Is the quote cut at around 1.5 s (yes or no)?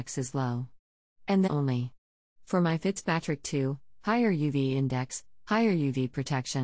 yes